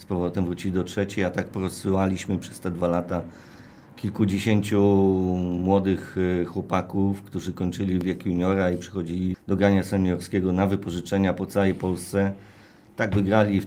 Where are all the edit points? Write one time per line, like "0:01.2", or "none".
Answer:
0:09.3